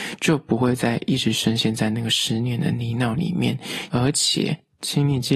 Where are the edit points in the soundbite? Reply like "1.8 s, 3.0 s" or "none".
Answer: 3.9 s

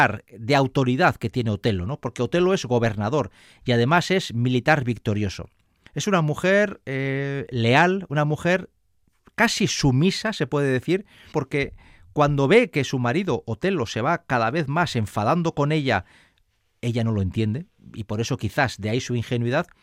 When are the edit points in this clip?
5.9 s, 11.3 s

